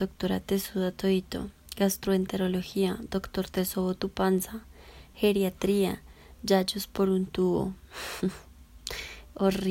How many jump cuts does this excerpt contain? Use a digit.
0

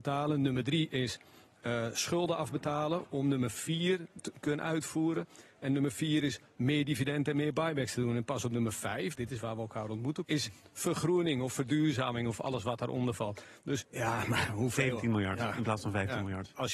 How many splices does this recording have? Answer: 3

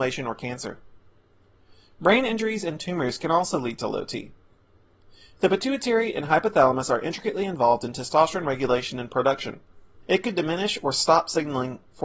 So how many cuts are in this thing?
1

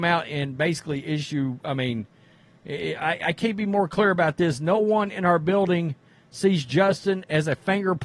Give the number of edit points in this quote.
0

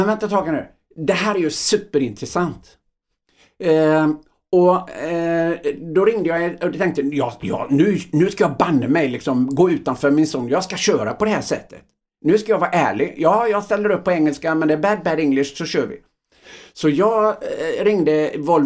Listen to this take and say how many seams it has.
0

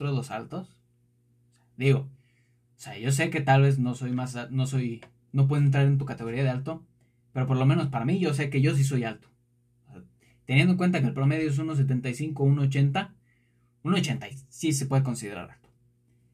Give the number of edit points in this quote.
1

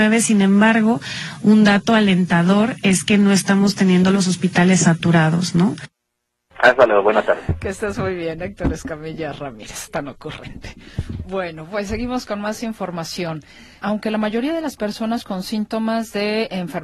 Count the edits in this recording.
2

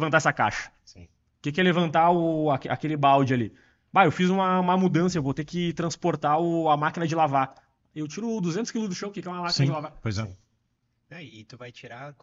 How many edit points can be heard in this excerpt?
0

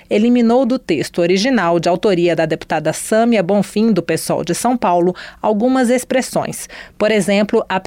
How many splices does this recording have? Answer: 0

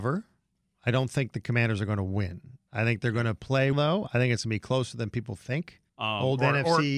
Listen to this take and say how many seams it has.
2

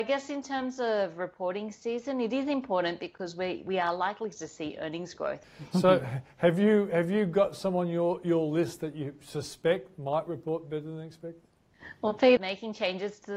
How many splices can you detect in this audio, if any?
2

